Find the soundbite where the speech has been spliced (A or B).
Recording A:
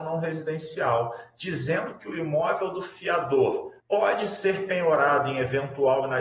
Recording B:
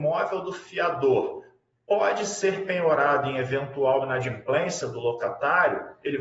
A